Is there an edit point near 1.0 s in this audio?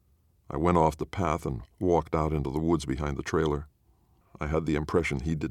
no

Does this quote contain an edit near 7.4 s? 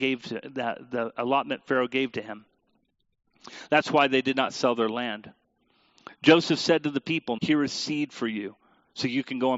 yes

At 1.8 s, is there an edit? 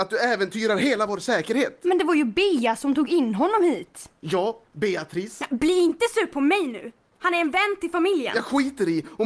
no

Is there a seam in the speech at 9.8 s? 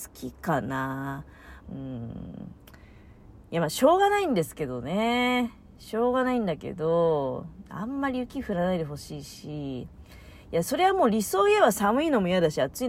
no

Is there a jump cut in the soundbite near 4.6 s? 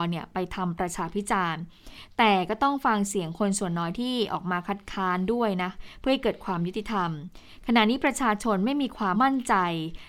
no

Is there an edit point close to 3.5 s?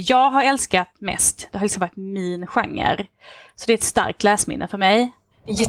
no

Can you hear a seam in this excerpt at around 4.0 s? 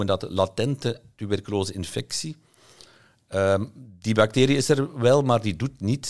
no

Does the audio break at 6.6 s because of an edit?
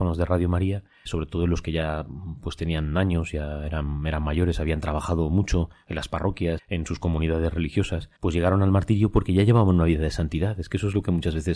yes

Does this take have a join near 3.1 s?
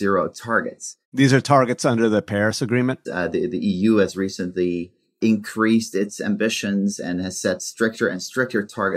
yes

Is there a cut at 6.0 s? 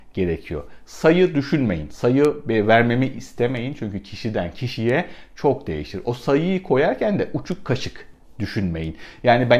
no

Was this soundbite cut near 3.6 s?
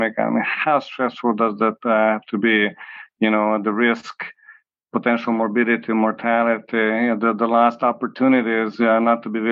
no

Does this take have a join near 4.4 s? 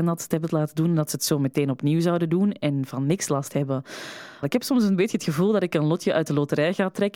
yes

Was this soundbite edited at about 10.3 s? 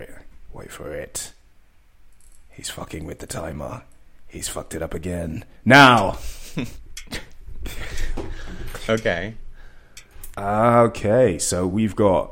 yes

